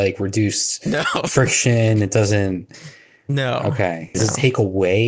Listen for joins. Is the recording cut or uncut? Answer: cut